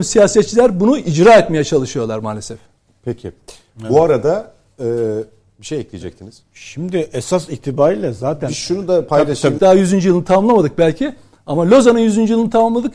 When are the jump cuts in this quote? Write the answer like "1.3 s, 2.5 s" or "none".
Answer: 9.6 s